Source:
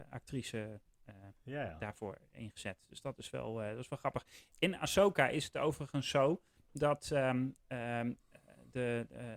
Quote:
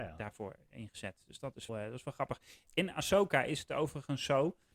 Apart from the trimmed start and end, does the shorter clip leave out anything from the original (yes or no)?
yes